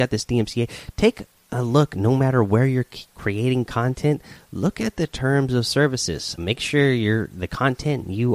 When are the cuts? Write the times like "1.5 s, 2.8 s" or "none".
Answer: 6.4 s